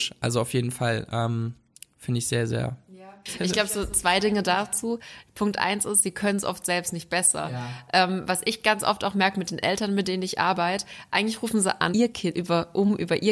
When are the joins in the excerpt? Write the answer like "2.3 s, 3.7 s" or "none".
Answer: 11.9 s